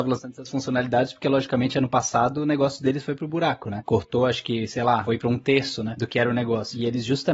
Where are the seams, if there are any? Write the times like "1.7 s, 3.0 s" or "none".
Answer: none